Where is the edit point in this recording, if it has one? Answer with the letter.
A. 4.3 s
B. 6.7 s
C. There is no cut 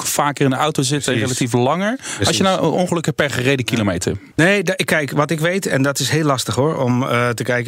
A